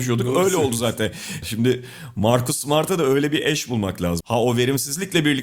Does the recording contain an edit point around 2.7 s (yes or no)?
no